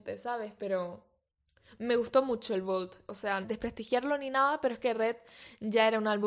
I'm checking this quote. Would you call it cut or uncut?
cut